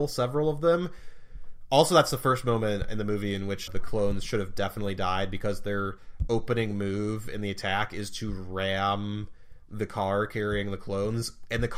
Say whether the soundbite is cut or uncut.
cut